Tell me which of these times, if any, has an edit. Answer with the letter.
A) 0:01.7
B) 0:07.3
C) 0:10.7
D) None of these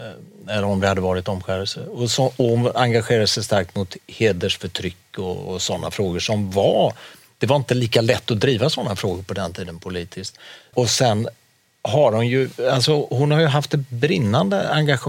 C